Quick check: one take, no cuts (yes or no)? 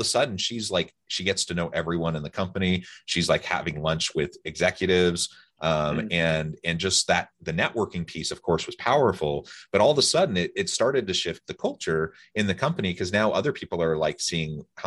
yes